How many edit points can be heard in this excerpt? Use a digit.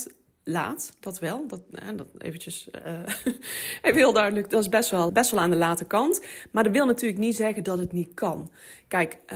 1